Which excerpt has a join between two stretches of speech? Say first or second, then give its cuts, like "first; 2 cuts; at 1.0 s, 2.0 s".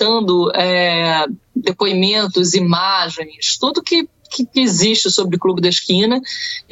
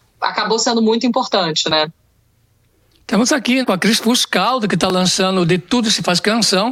second; 1 cut; at 3.6 s